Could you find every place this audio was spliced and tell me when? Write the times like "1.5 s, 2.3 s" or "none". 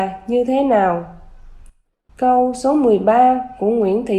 2.1 s